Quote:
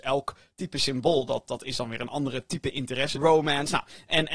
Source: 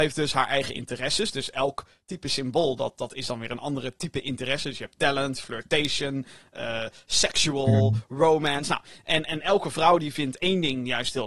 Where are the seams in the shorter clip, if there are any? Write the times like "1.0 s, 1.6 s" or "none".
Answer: 3.1 s